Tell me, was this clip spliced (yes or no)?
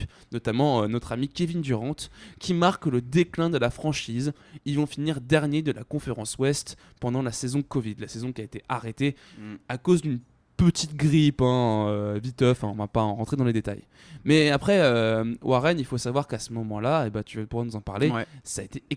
no